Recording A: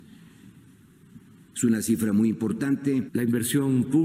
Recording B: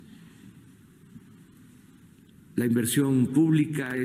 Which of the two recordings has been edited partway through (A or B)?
A